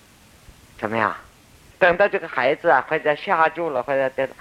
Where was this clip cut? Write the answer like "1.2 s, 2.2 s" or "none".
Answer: 1.7 s